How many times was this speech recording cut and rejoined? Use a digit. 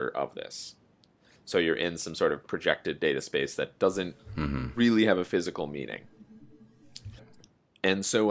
2